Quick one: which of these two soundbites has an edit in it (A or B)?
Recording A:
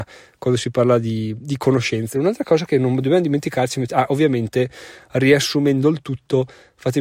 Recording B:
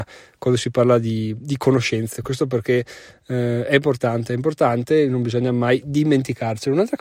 A